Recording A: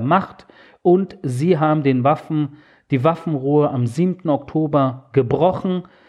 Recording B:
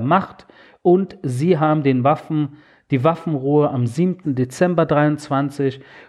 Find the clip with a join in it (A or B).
B